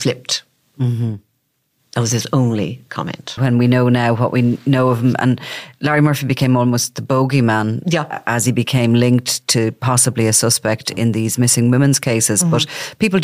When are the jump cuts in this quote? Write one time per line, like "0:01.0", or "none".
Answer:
0:03.4